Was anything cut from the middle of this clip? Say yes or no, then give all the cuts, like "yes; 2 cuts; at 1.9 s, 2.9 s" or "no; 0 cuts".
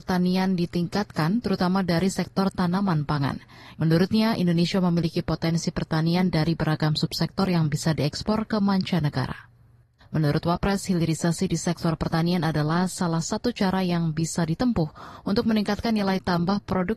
yes; 2 cuts; at 3.7 s, 10.0 s